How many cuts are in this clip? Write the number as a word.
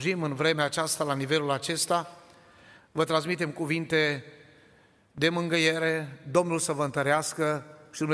zero